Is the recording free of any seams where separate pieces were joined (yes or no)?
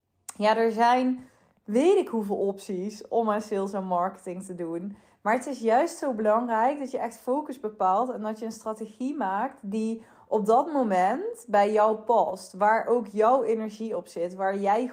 yes